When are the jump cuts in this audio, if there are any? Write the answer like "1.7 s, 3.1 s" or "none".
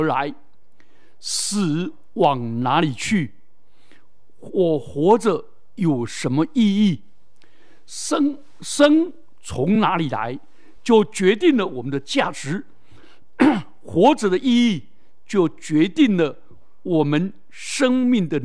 none